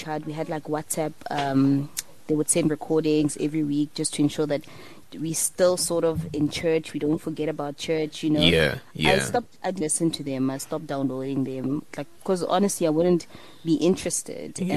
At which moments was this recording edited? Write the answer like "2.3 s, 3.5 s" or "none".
5.0 s, 9.8 s, 11.9 s